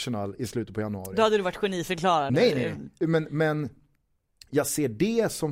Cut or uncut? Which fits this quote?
uncut